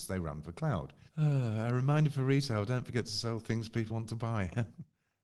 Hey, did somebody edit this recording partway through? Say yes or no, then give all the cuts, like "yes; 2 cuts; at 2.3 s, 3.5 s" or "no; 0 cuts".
yes; 2 cuts; at 1.1 s, 3.9 s